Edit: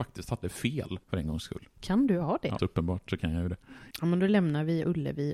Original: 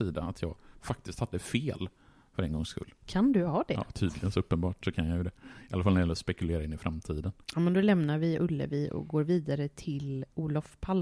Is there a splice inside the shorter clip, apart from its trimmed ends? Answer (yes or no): yes